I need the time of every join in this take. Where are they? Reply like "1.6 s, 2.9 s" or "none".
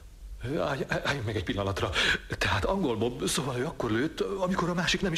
none